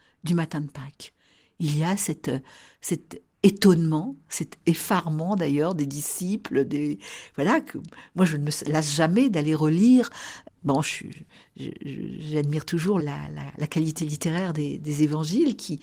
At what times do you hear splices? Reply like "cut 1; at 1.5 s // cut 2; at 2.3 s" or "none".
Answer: cut 1; at 13.0 s

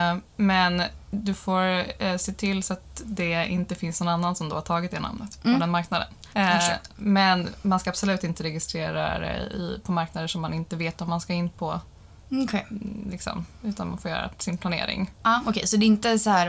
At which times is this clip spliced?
cut 1; at 6.3 s

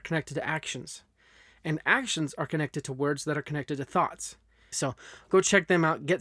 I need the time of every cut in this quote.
cut 1; at 4.7 s

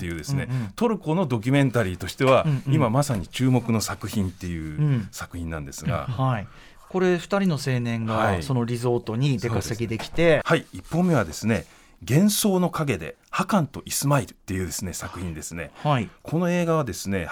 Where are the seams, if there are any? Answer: cut 1; at 10.4 s

